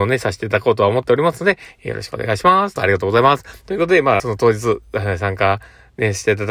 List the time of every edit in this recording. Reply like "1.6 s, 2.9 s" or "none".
2.8 s, 4.2 s